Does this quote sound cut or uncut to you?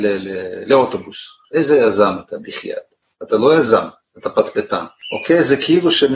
uncut